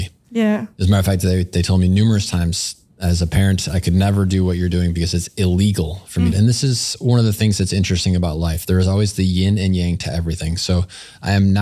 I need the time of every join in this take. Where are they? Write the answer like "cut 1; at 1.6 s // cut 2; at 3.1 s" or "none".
cut 1; at 6.3 s